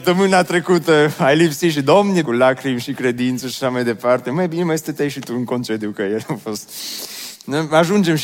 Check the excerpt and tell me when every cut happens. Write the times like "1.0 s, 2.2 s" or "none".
2.2 s

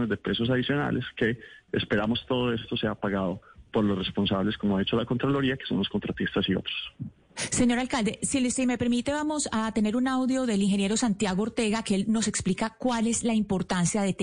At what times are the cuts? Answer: 8.2 s

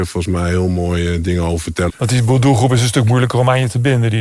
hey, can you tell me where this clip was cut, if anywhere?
1.9 s

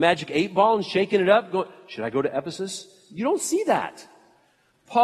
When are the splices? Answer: none

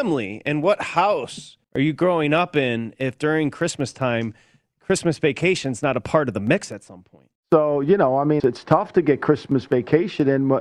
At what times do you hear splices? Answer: 1.6 s, 7.4 s, 8.4 s

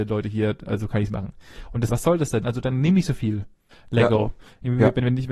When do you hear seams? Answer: 1.9 s, 3.7 s

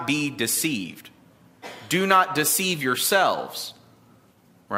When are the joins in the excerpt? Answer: none

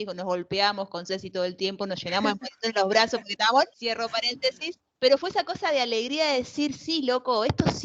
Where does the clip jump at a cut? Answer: 3.7 s

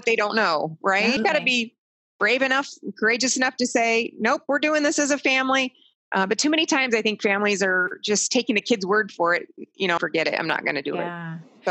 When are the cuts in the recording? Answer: 1.2 s, 5.9 s, 10.0 s

